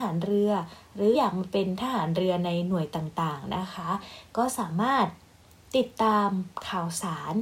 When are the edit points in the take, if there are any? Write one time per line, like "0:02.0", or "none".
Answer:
0:01.1